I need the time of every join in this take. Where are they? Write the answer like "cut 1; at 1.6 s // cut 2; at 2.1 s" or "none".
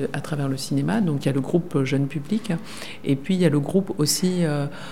none

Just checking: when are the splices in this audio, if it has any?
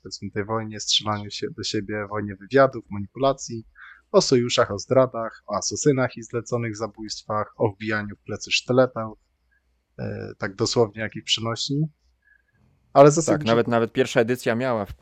none

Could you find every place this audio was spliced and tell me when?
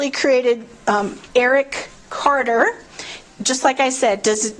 cut 1; at 1.2 s // cut 2; at 3.2 s

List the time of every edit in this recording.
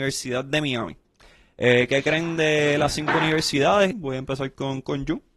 cut 1; at 3.9 s

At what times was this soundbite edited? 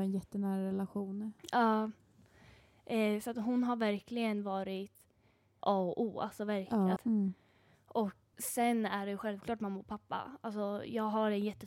cut 1; at 5.6 s // cut 2; at 7.0 s // cut 3; at 8.3 s

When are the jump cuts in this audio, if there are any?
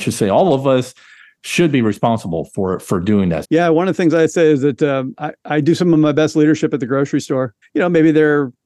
cut 1; at 3.4 s // cut 2; at 7.6 s

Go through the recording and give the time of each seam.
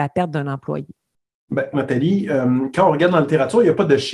cut 1; at 1.7 s

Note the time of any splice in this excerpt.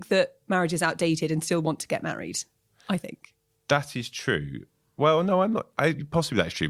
none

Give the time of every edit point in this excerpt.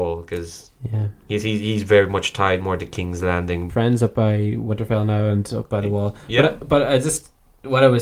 cut 1; at 3.7 s

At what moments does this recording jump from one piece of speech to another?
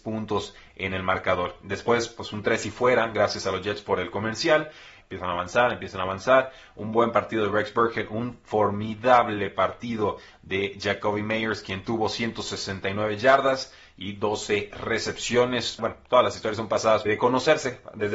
cut 1; at 5.0 s // cut 2; at 15.8 s // cut 3; at 17.1 s

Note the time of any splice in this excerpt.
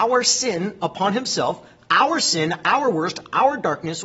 none

